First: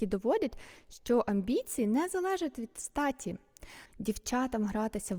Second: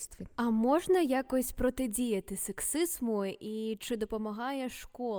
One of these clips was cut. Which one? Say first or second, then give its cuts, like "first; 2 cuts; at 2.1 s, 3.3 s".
first; 1 cut; at 3.9 s